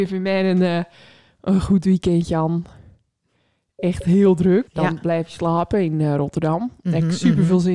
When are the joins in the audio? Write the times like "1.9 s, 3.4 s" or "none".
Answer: 4.7 s